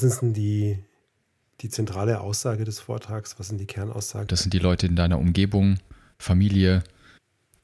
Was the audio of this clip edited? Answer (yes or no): yes